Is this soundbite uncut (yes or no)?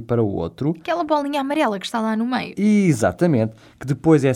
yes